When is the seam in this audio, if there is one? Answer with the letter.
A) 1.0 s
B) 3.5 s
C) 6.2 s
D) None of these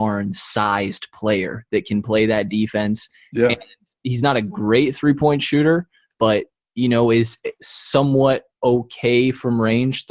C